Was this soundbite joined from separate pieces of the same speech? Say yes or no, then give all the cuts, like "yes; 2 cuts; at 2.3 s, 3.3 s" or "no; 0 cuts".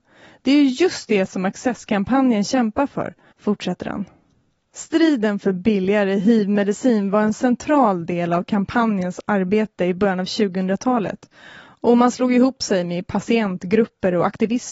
yes; 1 cut; at 3.3 s